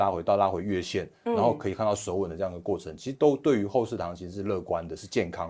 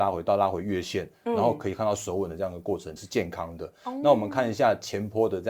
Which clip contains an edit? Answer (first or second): second